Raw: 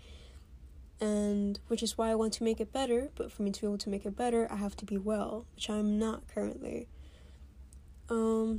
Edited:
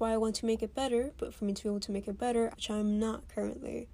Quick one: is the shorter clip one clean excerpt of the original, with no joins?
no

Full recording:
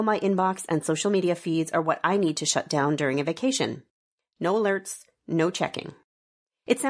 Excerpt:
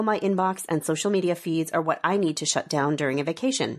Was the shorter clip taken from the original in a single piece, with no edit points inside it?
yes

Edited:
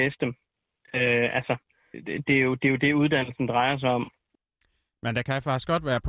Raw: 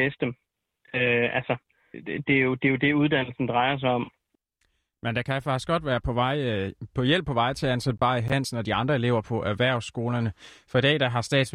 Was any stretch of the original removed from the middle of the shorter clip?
no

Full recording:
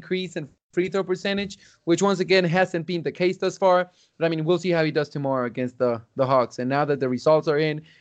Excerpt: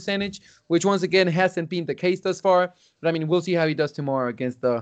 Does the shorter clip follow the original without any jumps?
yes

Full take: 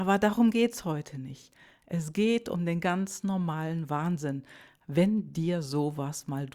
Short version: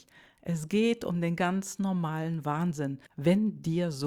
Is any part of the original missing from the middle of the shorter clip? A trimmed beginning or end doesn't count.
yes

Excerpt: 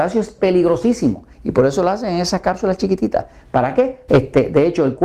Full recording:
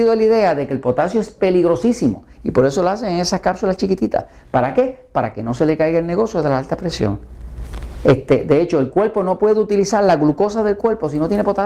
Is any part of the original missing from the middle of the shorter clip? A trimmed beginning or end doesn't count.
yes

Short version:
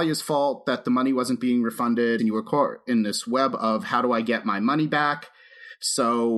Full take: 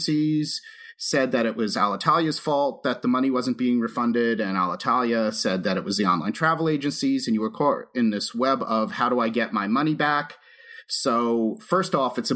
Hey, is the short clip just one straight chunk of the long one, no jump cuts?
no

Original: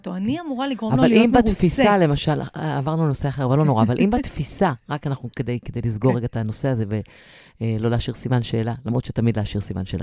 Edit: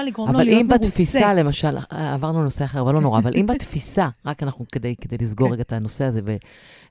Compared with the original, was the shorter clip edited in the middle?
no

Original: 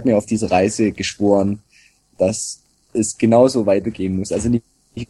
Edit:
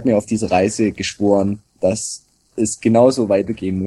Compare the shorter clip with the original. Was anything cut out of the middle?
yes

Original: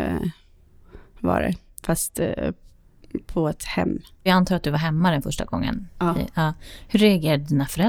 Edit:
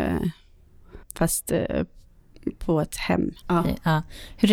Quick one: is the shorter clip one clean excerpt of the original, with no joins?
no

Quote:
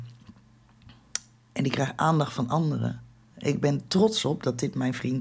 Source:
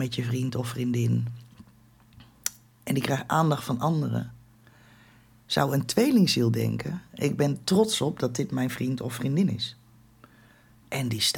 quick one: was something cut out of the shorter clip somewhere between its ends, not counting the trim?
yes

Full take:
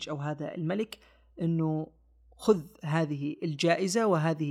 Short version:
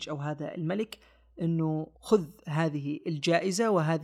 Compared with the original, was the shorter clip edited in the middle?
yes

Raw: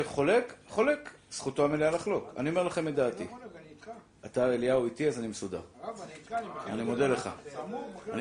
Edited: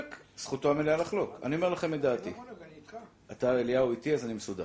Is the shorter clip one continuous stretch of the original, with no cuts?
yes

